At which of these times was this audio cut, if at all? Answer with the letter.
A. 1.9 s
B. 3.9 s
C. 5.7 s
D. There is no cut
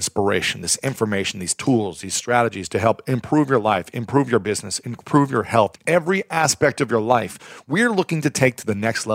C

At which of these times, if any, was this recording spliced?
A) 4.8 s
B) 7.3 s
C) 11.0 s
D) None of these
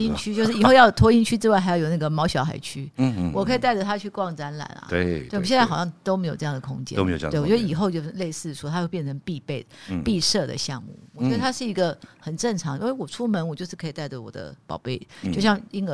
D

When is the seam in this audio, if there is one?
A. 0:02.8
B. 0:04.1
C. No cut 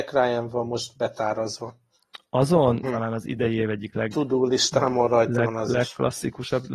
A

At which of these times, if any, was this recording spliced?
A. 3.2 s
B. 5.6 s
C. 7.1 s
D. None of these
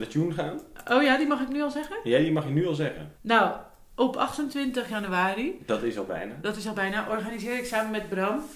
A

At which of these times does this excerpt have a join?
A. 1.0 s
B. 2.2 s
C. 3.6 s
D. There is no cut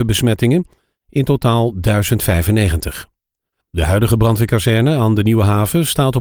C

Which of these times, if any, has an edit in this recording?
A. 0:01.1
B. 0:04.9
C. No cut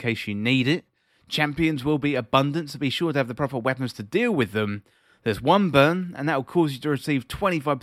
A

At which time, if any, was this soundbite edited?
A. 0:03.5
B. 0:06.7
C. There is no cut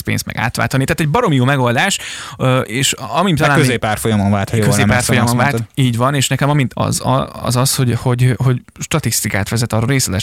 B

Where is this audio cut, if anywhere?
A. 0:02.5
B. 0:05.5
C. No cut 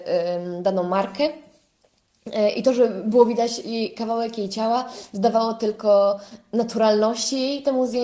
C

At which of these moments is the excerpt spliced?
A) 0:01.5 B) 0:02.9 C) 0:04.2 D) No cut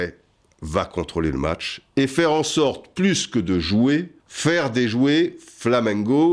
C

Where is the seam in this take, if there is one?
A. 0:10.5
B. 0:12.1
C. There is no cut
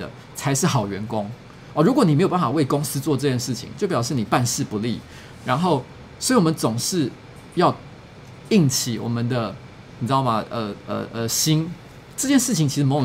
B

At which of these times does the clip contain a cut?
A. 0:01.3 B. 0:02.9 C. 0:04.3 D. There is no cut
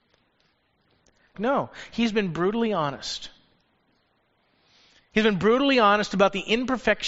A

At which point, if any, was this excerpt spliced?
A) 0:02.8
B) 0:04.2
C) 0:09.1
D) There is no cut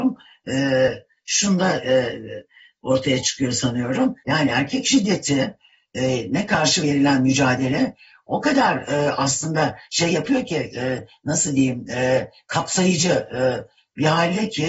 B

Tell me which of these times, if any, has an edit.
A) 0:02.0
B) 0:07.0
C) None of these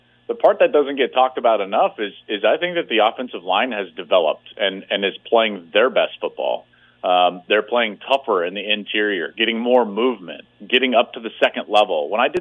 C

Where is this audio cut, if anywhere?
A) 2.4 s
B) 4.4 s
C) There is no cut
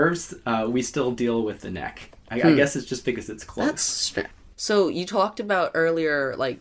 C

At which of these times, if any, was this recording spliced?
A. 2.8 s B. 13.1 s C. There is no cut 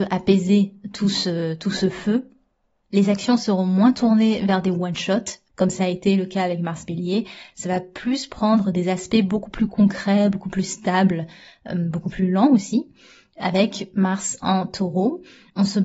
C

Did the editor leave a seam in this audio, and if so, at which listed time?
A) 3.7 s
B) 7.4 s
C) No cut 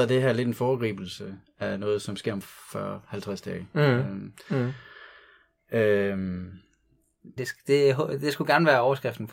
B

